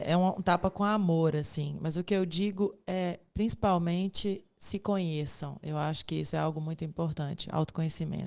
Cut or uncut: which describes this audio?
uncut